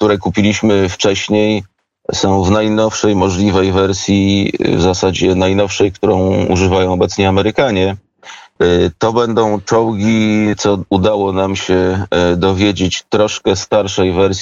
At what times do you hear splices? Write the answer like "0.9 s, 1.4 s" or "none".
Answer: 8.6 s, 10.5 s